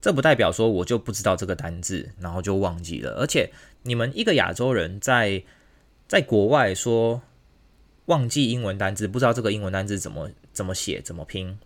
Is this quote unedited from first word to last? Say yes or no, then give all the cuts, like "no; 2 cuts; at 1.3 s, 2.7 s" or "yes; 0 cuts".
no; 1 cut; at 2.2 s